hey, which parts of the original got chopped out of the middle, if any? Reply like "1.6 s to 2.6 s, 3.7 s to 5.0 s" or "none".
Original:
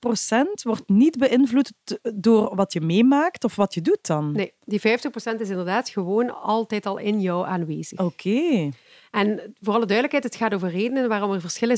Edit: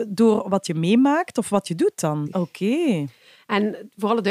4.3 s to 7.9 s